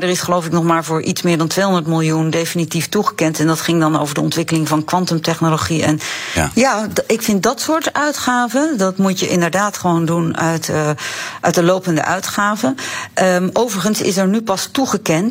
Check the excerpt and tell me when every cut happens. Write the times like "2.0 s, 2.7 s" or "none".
6.5 s